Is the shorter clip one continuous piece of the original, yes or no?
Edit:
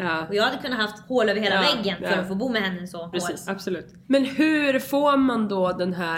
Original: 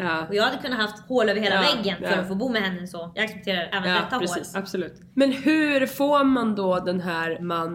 no